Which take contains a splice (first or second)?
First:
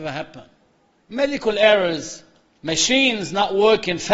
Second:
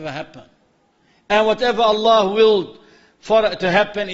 first